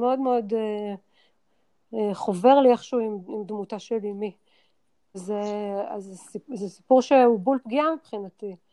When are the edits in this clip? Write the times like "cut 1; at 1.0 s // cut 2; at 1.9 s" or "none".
cut 1; at 5.1 s